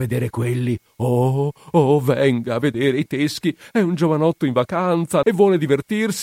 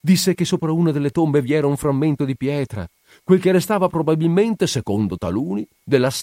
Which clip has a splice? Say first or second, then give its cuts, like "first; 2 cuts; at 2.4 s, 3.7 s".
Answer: first; 1 cut; at 5.2 s